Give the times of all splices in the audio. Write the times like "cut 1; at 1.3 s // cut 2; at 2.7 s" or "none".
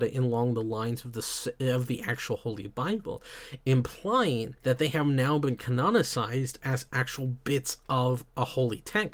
none